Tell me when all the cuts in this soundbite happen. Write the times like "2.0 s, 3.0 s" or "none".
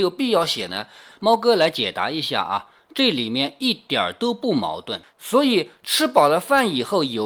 1.1 s, 5.0 s